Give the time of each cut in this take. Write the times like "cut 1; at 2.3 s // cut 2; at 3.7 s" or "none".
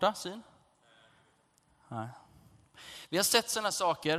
none